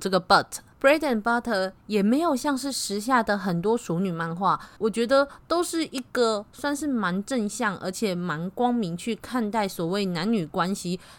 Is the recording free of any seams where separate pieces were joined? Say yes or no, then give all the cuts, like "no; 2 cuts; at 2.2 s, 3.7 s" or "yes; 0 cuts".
no; 1 cut; at 4.8 s